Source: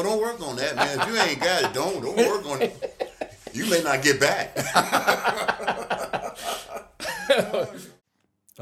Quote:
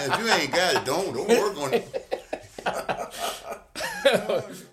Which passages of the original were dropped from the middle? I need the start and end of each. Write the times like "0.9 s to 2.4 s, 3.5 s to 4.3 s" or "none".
3.5 s to 5.9 s